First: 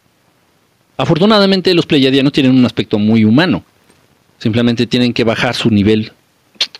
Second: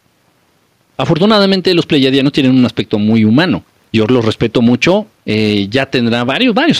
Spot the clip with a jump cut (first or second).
second